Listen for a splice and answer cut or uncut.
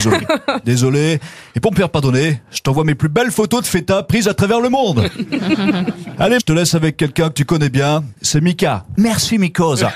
cut